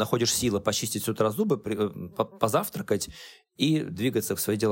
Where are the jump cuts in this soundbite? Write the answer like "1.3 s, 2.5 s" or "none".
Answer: none